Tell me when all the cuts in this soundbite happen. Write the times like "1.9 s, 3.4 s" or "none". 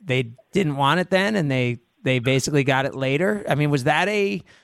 none